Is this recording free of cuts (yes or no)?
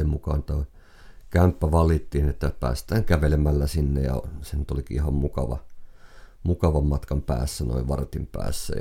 yes